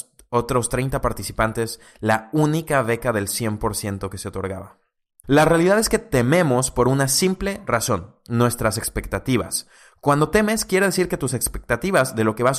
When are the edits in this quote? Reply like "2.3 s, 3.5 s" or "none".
5.2 s